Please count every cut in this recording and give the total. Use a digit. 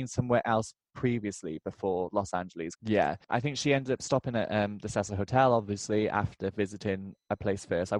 1